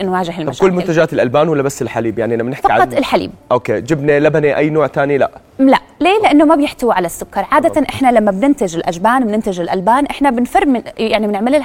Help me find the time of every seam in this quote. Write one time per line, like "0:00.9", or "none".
none